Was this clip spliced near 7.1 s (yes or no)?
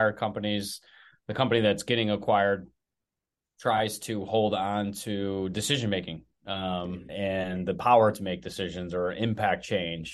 yes